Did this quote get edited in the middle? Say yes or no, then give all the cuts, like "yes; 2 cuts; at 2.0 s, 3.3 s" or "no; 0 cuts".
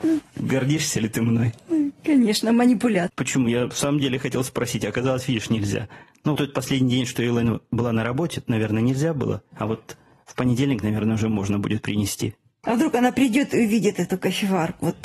yes; 1 cut; at 6.4 s